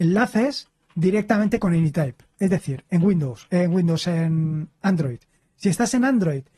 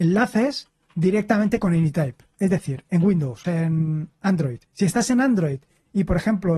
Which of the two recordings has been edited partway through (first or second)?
second